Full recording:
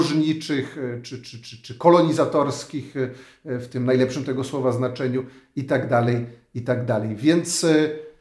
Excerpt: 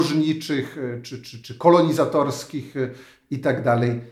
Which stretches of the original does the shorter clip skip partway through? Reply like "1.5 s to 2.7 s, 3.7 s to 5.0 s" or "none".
1.4 s to 1.6 s, 3.4 s to 5.5 s